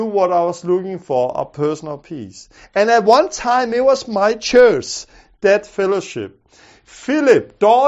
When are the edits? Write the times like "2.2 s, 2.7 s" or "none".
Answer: none